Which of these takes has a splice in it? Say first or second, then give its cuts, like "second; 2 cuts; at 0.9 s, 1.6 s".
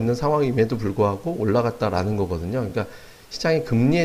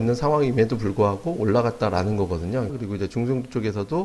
second; 1 cut; at 2.7 s